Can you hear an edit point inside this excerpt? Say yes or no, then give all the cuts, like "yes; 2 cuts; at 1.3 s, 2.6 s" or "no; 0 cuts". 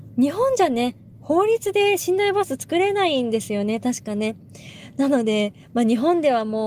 no; 0 cuts